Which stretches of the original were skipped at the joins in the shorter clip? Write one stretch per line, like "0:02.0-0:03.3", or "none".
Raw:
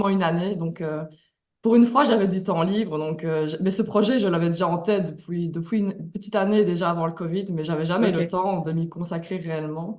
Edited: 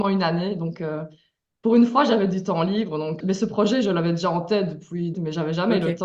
0:03.2-0:03.6
0:05.5-0:07.5